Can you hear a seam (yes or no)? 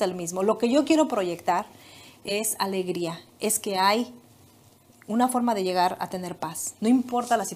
no